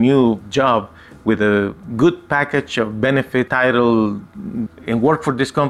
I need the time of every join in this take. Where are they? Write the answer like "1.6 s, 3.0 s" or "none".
3.5 s, 4.7 s